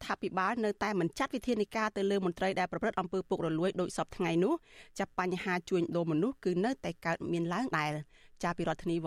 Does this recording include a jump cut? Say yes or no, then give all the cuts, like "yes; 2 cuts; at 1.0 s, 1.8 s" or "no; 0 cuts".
yes; 1 cut; at 7.7 s